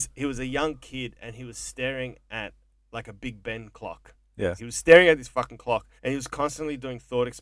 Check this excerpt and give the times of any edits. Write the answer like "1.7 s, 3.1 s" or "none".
4.6 s, 6.0 s